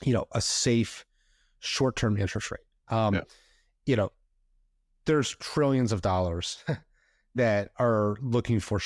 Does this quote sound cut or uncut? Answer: uncut